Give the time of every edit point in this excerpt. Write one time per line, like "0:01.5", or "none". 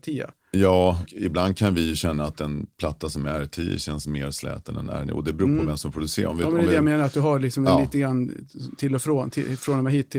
0:01.1